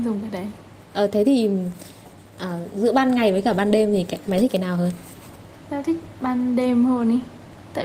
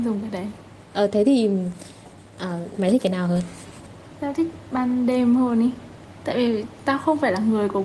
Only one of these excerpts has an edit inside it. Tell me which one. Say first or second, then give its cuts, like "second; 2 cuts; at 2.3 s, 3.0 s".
second; 1 cut; at 2.7 s